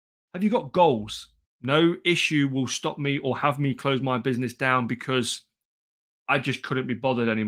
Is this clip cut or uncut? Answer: cut